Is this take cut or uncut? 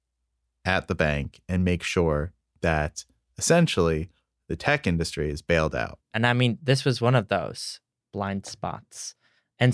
cut